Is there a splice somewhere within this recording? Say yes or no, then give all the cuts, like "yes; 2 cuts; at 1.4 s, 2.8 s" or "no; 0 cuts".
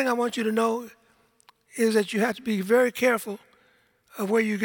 no; 0 cuts